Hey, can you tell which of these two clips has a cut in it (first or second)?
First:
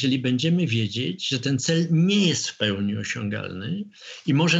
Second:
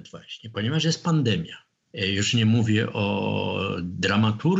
second